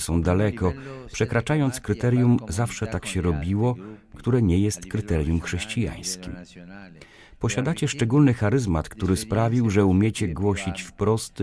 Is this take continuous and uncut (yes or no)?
yes